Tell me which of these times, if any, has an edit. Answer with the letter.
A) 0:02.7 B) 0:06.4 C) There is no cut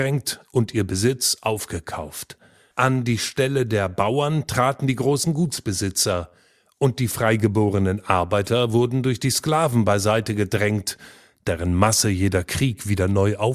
A